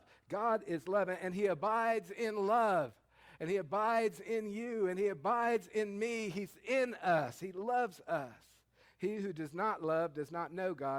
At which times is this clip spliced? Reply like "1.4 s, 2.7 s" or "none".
8.8 s